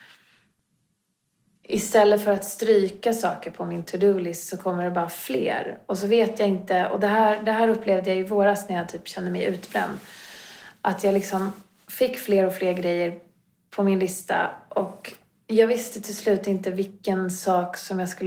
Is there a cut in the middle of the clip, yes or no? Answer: no